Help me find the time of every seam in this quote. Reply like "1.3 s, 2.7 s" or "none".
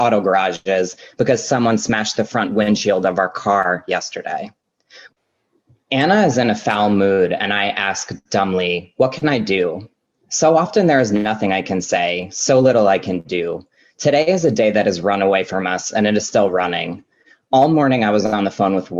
5.1 s

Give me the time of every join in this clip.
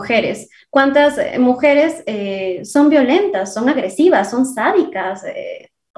none

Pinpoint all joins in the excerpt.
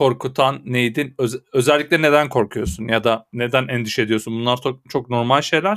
none

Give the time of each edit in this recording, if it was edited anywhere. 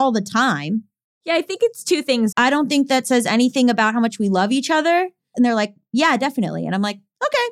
2.3 s, 5.3 s

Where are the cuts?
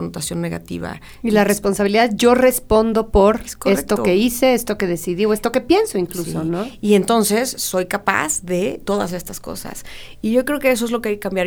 none

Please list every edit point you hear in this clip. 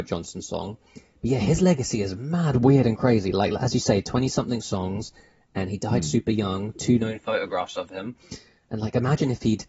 none

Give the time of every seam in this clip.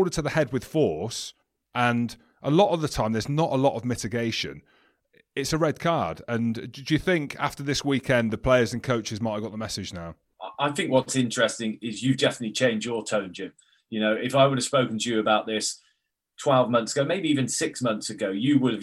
none

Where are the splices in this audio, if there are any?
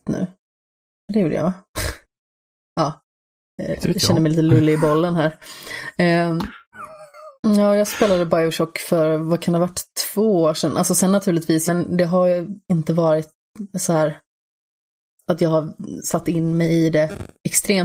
6.7 s, 11.7 s

